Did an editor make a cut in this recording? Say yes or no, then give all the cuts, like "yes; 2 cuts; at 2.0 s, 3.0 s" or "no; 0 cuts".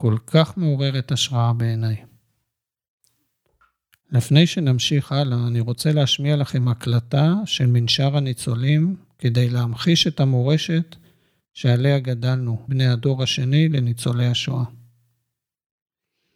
yes; 1 cut; at 12.7 s